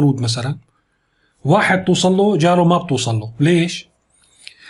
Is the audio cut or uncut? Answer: uncut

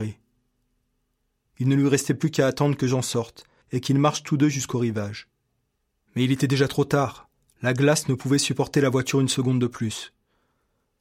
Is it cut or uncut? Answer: cut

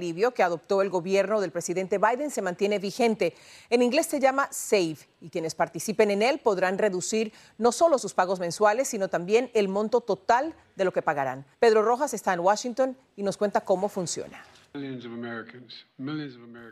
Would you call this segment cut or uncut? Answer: cut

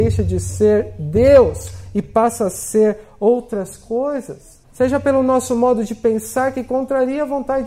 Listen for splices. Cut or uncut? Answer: cut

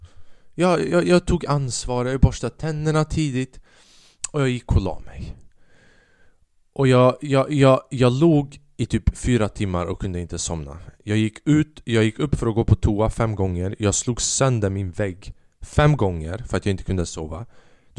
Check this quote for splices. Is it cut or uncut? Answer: uncut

